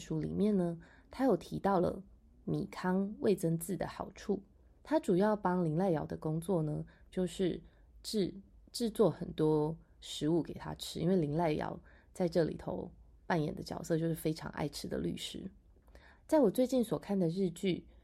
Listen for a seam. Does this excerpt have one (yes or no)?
yes